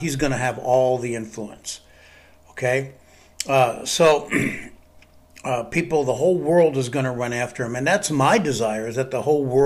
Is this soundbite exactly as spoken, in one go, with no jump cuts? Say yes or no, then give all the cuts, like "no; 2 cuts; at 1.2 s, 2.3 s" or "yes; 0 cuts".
yes; 0 cuts